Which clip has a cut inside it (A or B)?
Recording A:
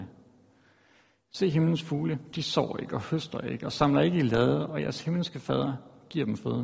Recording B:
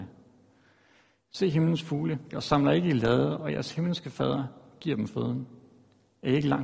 B